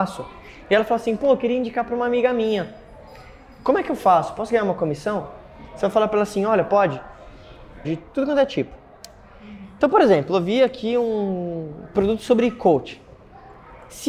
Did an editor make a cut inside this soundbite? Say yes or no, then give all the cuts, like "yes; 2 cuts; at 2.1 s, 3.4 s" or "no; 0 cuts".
yes; 1 cut; at 7.8 s